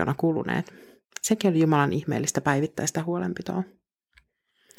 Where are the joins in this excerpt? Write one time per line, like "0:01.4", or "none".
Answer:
none